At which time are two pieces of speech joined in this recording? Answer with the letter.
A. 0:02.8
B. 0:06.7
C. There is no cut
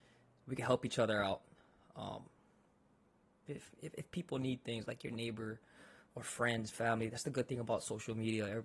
C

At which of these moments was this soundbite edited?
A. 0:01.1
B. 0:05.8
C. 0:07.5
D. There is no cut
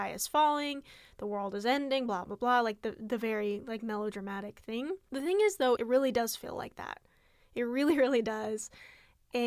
B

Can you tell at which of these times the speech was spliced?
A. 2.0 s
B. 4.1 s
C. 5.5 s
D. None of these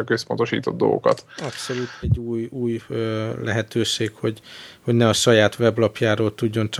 A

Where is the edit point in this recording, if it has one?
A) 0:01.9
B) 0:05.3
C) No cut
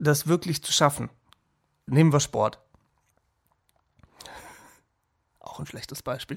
A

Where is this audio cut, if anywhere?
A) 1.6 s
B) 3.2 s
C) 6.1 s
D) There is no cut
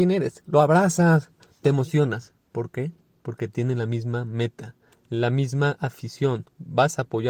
A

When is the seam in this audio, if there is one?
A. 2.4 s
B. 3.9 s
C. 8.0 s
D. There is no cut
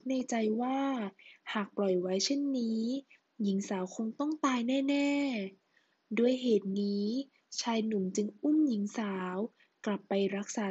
D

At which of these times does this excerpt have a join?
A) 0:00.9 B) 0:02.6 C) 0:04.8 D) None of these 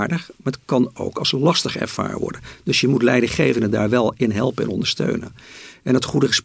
D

